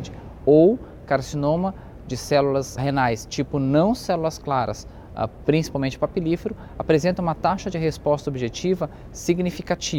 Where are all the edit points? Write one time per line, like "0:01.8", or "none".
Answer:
0:02.8